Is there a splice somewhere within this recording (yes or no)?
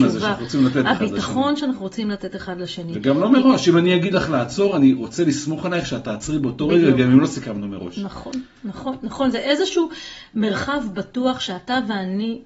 no